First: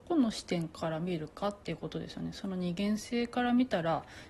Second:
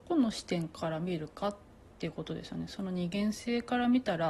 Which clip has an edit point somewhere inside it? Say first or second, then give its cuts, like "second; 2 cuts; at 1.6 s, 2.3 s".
first; 1 cut; at 1.6 s